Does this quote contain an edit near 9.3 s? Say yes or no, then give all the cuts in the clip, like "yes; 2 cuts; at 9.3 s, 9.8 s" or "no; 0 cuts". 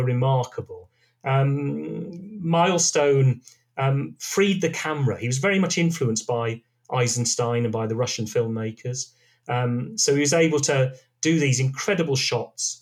no; 0 cuts